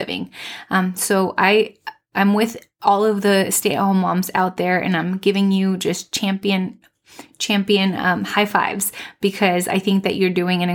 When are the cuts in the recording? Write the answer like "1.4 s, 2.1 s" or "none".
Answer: none